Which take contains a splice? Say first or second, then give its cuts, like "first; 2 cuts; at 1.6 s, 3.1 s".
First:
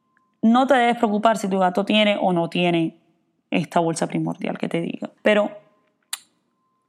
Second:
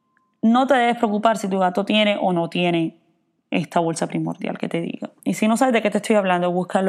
first; 1 cut; at 5.2 s